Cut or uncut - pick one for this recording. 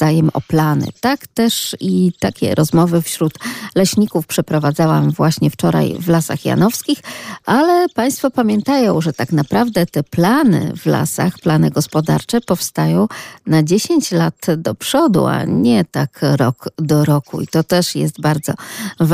cut